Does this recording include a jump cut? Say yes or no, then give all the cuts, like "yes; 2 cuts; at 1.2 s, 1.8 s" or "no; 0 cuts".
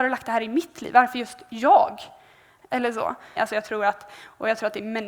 yes; 1 cut; at 3.4 s